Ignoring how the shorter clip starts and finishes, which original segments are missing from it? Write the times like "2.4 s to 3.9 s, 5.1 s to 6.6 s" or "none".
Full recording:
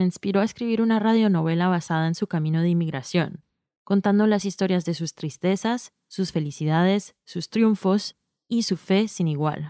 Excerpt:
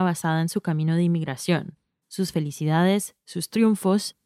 3.7 s to 6.0 s